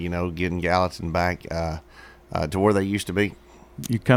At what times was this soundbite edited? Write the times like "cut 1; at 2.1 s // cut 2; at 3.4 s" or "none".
none